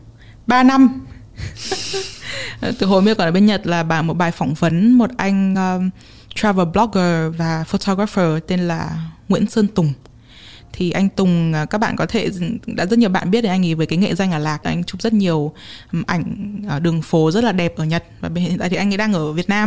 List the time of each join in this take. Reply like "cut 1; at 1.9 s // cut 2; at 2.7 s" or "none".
none